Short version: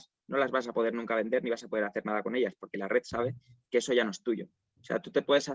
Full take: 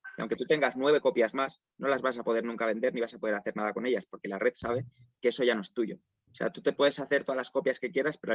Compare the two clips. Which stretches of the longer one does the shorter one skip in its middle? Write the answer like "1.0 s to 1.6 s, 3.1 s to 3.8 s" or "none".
none